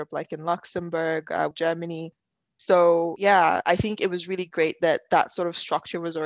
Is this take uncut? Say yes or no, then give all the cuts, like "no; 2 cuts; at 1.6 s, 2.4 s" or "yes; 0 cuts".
no; 1 cut; at 1.5 s